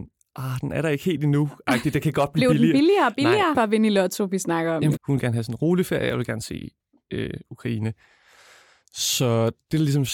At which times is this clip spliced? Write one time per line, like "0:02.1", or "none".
0:03.5
0:04.9